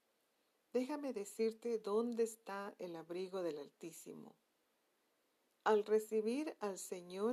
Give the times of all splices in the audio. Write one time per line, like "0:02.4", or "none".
0:05.5